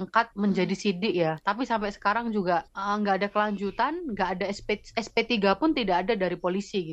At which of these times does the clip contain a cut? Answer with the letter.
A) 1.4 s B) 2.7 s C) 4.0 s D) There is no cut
A